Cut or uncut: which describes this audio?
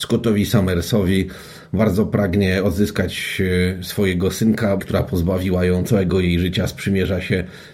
cut